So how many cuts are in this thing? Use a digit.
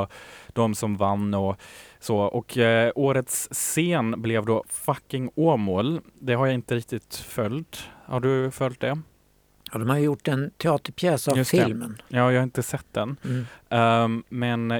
0